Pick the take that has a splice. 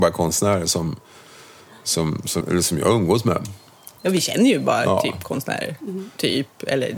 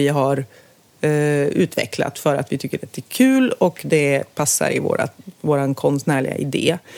first; 1 cut; at 2.4 s

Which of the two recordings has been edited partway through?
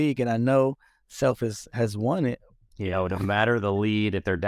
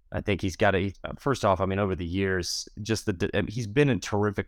first; 1 cut; at 2.7 s

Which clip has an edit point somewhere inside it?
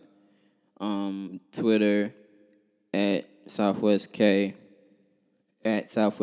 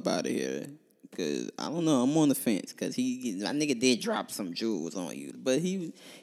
second; 1 cut; at 5.3 s

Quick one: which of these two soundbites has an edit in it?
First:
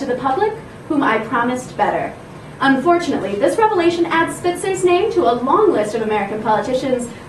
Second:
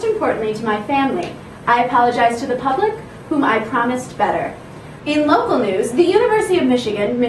second; 1 cut; at 5.0 s

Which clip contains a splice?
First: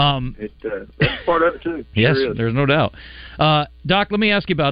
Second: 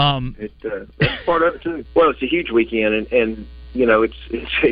second; 1 cut; at 1.9 s

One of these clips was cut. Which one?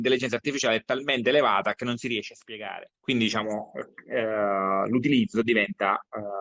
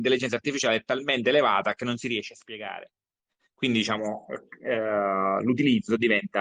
first; 1 cut; at 2.9 s

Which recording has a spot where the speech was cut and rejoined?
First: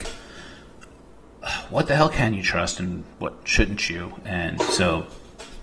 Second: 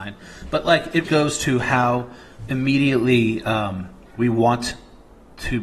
second; 1 cut; at 1.0 s

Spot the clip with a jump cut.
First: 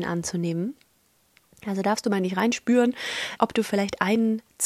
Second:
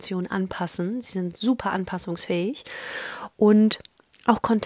first; 1 cut; at 3.4 s

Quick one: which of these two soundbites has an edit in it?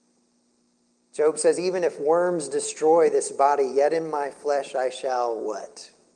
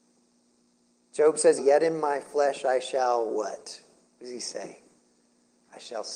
second; 1 cut; at 1.6 s

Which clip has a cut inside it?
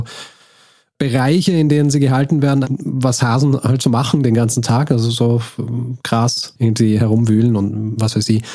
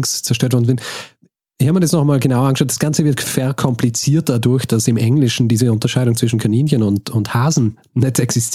first; 1 cut; at 2.6 s

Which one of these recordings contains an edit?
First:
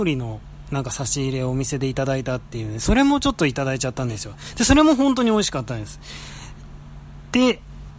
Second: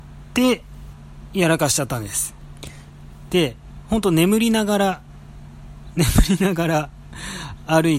second; 1 cut; at 3.3 s

